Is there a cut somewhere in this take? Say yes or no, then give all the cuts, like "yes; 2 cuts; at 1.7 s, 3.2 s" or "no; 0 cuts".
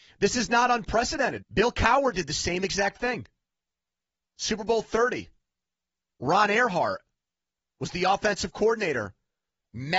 yes; 1 cut; at 1.4 s